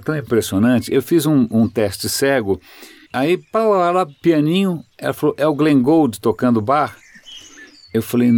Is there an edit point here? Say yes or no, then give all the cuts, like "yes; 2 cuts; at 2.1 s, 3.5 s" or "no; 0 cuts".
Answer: yes; 1 cut; at 3.1 s